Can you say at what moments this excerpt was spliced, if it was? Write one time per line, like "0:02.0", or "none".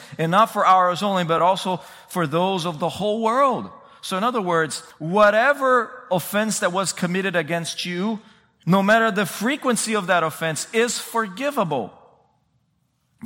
none